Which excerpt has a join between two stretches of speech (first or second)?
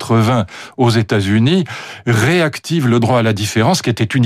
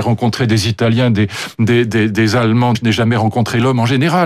second